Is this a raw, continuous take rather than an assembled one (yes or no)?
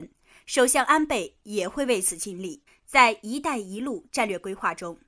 no